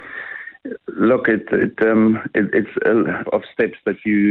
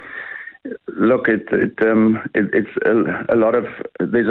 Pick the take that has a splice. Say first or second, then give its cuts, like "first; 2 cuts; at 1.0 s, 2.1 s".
first; 1 cut; at 3.2 s